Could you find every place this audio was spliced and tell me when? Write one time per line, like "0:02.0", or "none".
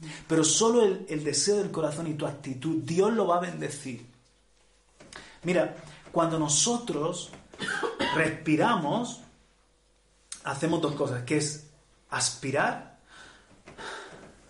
none